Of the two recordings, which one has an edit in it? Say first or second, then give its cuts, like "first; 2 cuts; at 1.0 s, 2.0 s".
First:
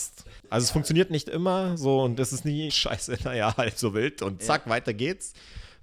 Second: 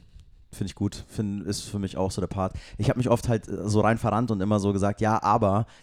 first; 1 cut; at 2.7 s